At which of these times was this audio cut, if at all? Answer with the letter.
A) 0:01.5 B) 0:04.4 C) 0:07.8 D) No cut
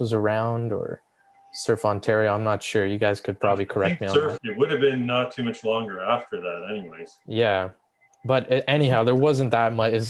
B